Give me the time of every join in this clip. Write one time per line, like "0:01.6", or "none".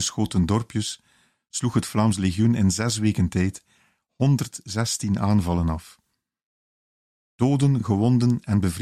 none